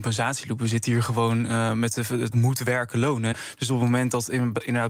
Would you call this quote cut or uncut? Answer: cut